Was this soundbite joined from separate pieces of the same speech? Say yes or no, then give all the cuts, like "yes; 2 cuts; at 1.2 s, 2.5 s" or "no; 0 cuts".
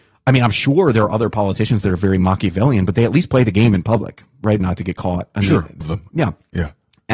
yes; 2 cuts; at 4.6 s, 5.8 s